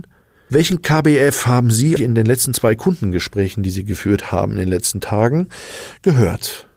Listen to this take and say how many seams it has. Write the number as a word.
one